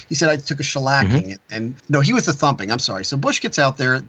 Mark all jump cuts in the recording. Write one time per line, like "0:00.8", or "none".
0:01.8